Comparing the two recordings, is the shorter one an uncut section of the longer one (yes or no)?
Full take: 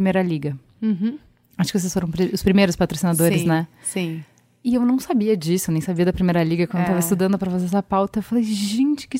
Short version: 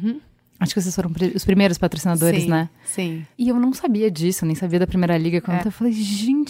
no